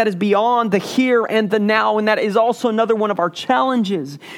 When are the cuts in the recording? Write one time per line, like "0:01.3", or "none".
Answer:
none